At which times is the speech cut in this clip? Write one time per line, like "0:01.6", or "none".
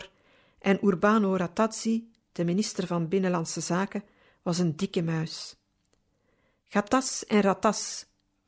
none